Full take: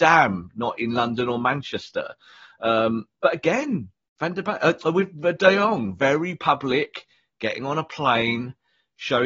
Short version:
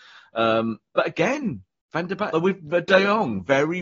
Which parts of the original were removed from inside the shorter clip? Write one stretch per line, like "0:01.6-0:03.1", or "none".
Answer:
0:04.6-0:04.8